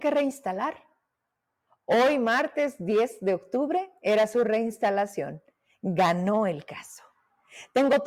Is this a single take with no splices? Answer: yes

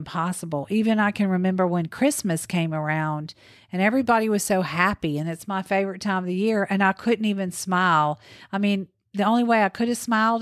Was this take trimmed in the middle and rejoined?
no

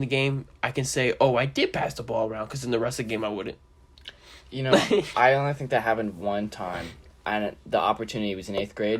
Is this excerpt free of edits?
yes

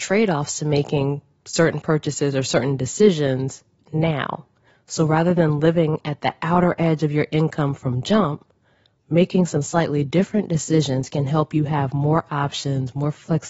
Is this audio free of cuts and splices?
yes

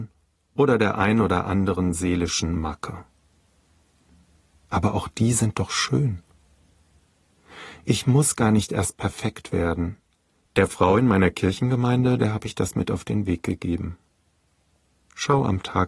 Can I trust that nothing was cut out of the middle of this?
no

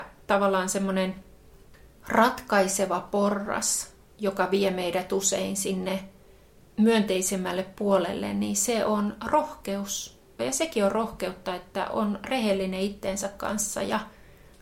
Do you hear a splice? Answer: yes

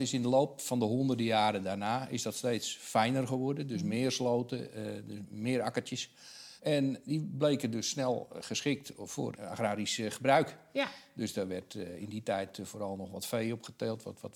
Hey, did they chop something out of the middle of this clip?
yes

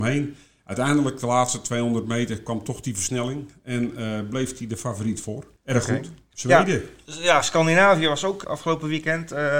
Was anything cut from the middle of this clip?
yes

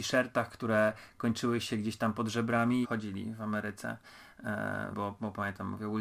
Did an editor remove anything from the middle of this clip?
yes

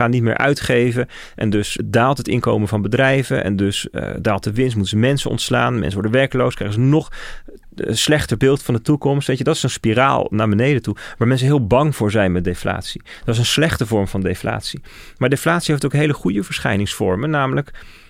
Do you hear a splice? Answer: no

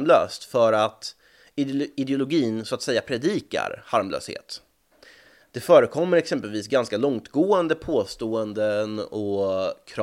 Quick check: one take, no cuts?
yes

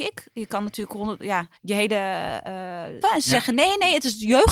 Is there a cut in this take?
yes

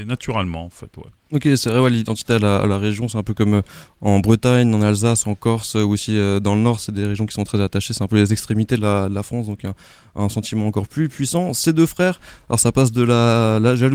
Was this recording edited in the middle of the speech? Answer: no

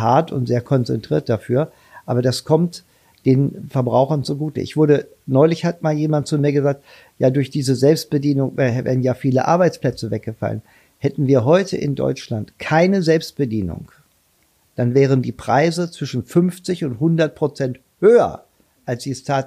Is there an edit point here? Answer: no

